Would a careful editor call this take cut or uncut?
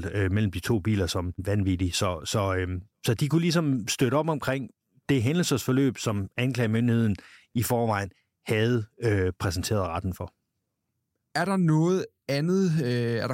uncut